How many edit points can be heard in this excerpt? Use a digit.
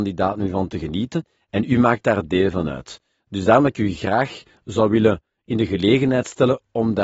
0